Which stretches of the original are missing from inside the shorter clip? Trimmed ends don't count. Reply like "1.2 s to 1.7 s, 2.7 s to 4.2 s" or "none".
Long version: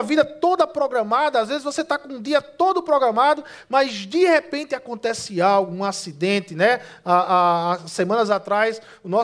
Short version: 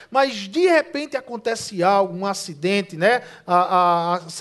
none